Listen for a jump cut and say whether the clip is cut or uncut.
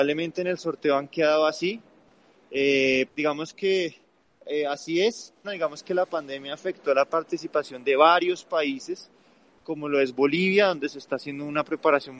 cut